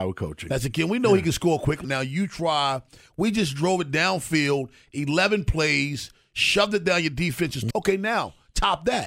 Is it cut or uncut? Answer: cut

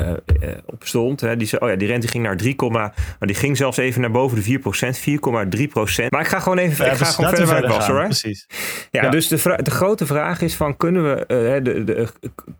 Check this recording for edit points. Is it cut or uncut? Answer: cut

